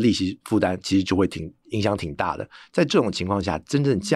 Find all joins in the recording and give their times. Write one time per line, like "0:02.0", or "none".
0:01.1

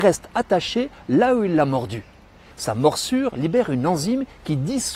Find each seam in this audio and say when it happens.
0:02.5

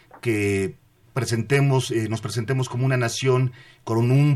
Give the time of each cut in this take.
none

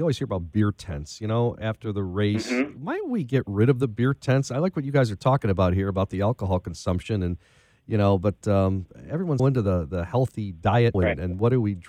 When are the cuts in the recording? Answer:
0:09.4
0:10.9

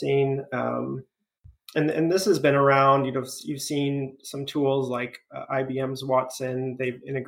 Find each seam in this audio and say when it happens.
none

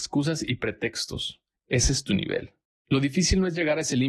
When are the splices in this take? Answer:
0:01.6

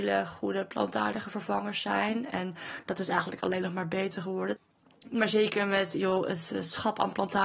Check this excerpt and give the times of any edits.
none

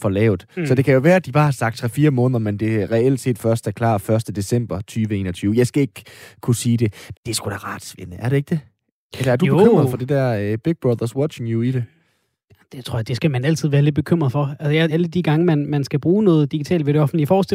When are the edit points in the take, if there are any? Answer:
0:07.1
0:14.9

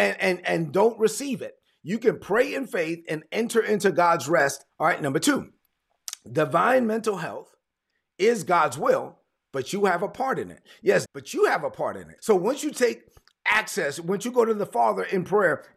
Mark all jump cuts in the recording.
0:04.7
0:11.1
0:12.2

